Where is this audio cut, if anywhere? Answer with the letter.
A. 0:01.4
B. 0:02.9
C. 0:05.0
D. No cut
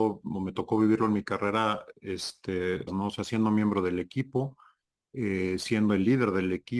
B